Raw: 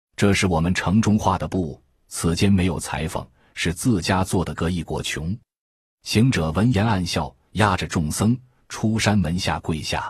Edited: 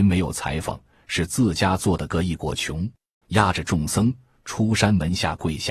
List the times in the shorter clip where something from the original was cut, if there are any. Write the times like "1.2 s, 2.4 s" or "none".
3.2 s